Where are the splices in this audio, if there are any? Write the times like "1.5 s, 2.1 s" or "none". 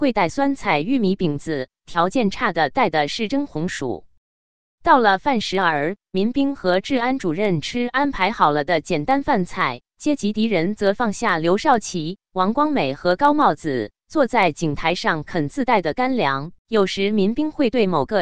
16.6 s